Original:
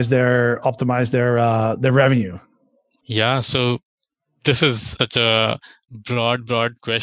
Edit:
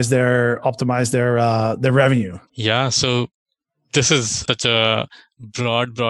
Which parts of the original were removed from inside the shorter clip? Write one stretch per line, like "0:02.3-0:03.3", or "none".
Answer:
0:02.5-0:03.0